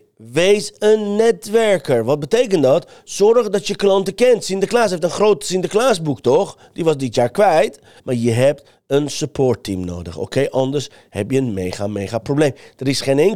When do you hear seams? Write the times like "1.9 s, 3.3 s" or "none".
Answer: 8.0 s